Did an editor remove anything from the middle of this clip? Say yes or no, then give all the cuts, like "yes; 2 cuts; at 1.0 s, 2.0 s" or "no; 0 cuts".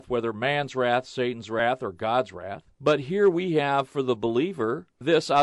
no; 0 cuts